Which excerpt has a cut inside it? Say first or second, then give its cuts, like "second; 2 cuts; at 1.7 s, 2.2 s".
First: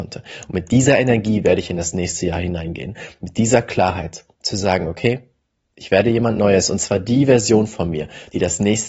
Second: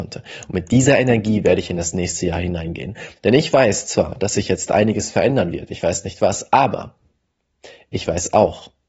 second; 1 cut; at 3.2 s